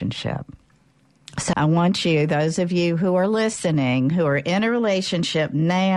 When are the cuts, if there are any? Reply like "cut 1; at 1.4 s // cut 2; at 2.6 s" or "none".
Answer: cut 1; at 1.5 s